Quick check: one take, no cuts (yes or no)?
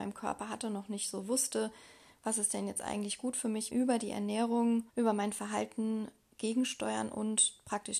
no